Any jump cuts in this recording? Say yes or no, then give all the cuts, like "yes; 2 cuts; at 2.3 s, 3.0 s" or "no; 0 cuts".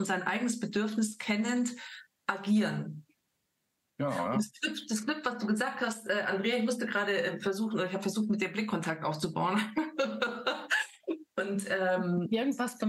no; 0 cuts